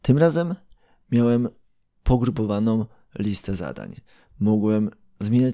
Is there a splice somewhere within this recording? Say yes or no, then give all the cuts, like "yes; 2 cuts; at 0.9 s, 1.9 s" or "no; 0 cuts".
no; 0 cuts